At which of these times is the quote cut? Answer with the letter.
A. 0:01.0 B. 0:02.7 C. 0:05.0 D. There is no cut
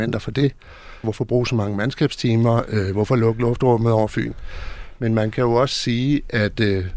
A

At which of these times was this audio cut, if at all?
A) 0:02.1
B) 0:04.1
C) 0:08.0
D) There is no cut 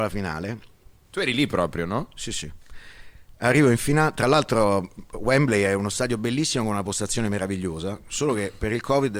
D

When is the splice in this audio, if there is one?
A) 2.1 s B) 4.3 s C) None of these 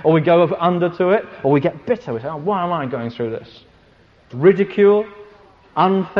B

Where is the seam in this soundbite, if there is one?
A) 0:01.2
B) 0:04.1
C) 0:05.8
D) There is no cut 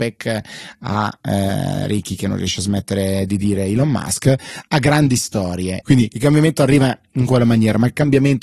C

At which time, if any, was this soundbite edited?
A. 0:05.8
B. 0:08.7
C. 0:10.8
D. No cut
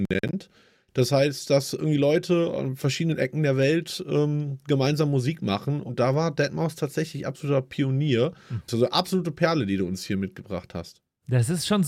B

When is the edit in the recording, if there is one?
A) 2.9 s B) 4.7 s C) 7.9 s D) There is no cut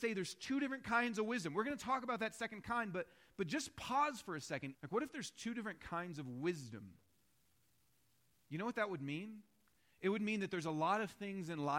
B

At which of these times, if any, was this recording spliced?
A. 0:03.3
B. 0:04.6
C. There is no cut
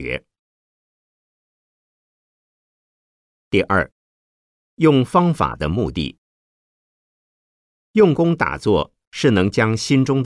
C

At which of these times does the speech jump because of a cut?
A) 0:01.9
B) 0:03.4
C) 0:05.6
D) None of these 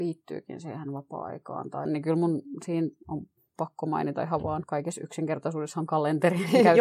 A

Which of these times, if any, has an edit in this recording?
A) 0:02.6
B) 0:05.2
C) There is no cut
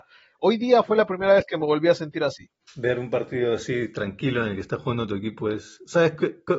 A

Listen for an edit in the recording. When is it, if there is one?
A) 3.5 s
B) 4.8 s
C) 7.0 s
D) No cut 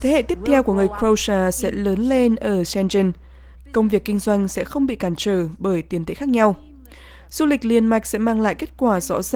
A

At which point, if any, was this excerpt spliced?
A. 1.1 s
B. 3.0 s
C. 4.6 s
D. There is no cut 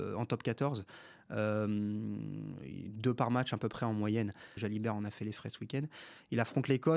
C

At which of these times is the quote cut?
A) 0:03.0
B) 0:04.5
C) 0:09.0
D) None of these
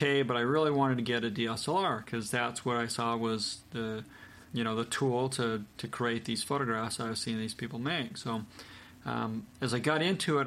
B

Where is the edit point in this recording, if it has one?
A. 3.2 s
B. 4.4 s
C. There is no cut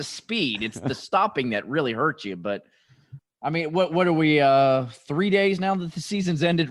A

